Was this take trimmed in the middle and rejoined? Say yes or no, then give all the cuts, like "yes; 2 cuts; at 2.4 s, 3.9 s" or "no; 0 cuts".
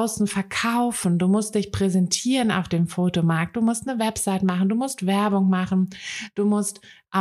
no; 0 cuts